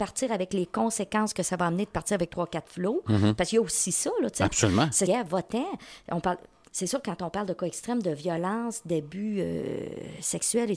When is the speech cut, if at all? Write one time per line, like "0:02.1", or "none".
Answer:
0:05.1